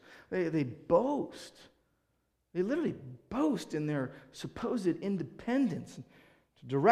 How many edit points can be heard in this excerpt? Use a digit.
0